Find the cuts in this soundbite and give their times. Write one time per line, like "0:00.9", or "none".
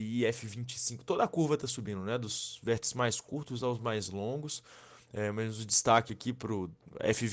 none